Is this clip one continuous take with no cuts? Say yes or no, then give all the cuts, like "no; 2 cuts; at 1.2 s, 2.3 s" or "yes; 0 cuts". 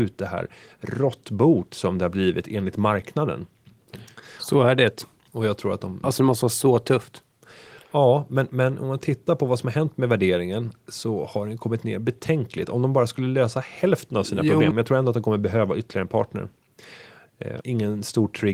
no; 3 cuts; at 6.0 s, 14.7 s, 17.6 s